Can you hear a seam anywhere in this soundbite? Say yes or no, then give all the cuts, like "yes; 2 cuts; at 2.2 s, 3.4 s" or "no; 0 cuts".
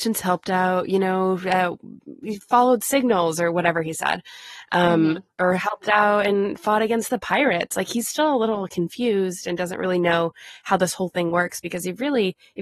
no; 0 cuts